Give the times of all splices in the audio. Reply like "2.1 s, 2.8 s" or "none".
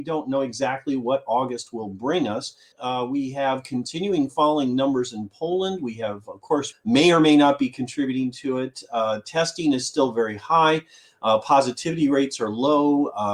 2.7 s, 6.7 s